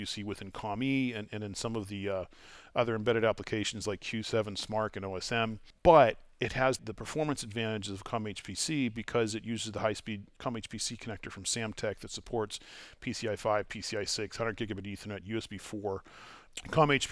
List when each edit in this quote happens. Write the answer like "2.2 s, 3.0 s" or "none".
none